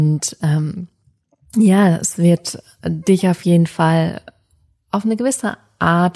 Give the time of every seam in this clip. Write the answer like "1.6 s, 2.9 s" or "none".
none